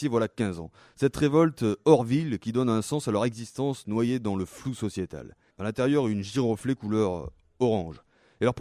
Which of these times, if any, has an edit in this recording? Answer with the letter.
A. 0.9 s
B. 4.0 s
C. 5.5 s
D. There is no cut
C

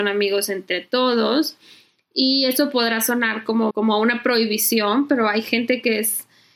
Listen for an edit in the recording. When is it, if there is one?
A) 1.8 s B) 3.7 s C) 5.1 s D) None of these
B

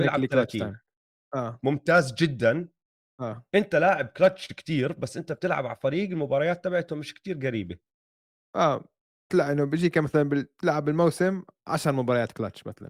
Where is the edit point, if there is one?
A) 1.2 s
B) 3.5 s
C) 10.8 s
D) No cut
A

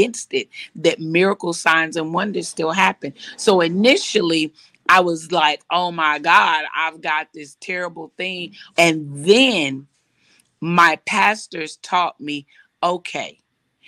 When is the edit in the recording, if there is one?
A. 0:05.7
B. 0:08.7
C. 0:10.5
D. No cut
B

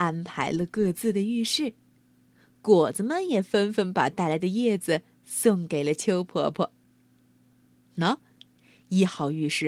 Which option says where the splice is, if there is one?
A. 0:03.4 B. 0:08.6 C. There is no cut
C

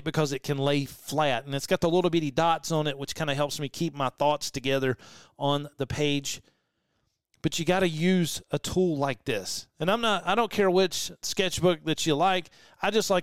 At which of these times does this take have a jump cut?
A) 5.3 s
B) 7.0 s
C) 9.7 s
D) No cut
D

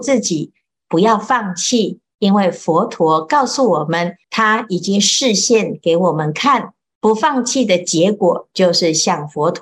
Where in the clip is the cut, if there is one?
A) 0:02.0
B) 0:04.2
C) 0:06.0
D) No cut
B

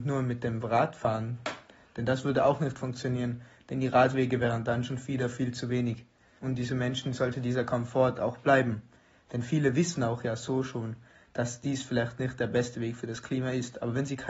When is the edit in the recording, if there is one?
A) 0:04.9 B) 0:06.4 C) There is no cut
B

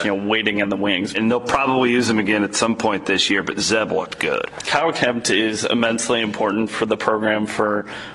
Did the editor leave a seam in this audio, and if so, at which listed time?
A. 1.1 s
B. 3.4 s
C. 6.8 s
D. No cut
A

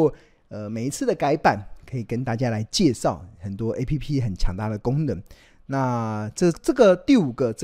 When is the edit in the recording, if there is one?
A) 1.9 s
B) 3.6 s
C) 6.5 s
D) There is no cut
C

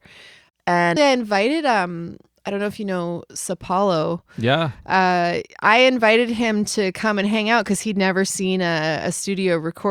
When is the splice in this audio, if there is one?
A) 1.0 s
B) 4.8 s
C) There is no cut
A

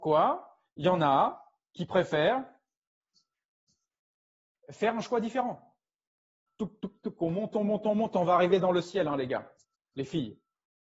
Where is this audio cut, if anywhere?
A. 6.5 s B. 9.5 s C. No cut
A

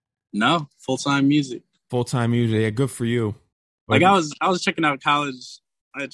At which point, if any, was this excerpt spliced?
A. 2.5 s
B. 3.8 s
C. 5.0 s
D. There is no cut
B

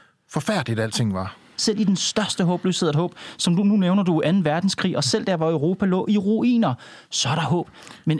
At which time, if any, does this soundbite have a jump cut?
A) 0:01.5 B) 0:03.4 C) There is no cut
A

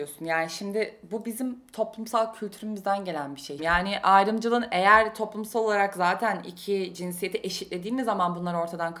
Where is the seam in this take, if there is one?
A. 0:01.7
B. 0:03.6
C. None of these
B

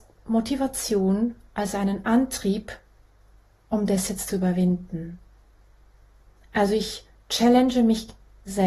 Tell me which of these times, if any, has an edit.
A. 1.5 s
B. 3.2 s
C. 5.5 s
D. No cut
D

